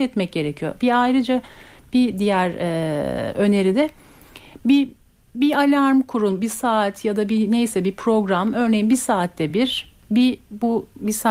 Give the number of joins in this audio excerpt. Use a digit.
0